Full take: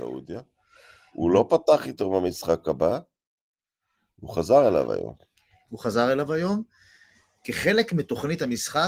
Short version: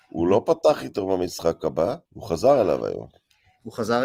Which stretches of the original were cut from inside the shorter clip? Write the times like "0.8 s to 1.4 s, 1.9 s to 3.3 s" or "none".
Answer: 3.1 s to 4.1 s